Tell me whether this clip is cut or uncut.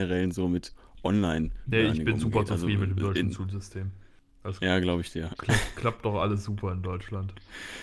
uncut